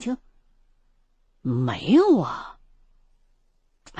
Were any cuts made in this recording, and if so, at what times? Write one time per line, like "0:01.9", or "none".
0:01.3